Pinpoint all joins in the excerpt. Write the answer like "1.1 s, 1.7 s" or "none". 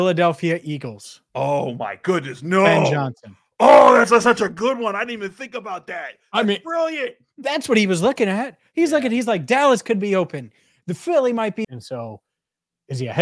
11.6 s